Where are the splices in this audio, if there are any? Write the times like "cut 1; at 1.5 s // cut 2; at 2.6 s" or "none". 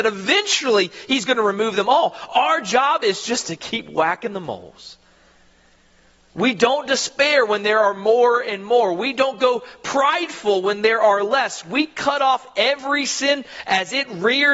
none